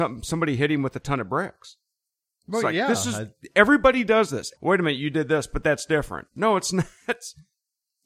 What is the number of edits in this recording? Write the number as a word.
one